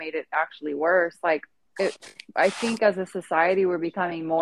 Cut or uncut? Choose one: uncut